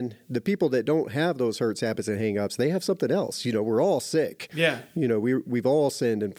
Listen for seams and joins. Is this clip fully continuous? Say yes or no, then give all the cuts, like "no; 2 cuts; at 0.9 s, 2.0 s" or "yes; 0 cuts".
yes; 0 cuts